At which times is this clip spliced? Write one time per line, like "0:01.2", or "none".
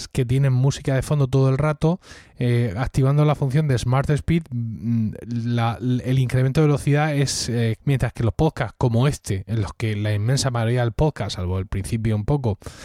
0:07.8